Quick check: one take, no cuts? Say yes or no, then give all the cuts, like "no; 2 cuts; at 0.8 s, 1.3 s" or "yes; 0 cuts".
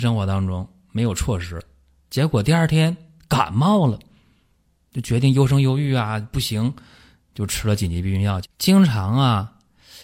no; 1 cut; at 8.4 s